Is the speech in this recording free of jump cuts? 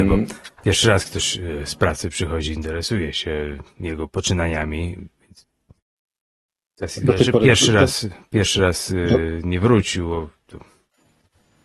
yes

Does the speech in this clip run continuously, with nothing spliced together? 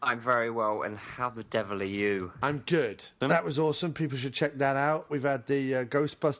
no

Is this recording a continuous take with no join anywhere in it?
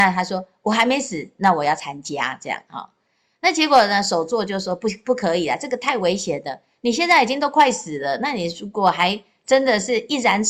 yes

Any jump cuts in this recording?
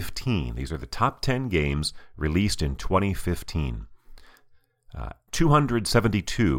yes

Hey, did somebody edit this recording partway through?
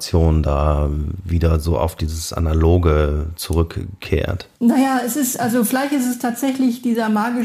yes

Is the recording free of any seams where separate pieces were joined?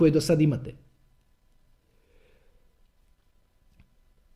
yes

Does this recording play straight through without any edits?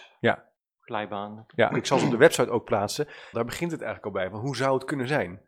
no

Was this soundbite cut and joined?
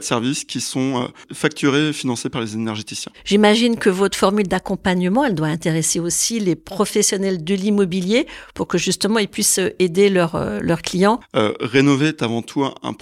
yes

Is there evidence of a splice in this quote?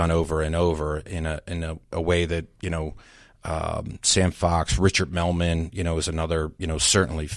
no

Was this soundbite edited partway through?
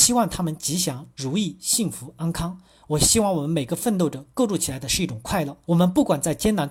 yes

